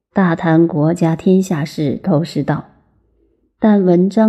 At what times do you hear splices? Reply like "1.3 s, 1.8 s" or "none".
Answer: 2.0 s